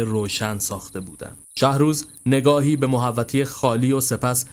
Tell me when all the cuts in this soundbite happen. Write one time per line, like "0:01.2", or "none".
0:01.4